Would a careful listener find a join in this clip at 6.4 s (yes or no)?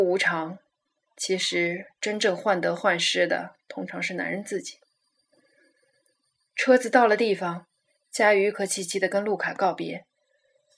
no